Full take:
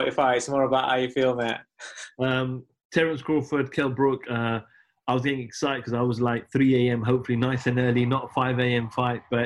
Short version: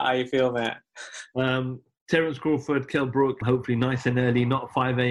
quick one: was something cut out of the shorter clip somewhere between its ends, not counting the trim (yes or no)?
yes